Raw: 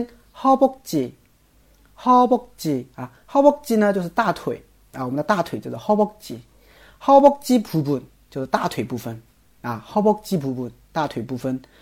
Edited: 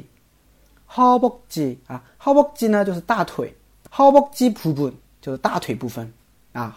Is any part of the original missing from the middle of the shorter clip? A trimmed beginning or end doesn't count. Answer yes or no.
yes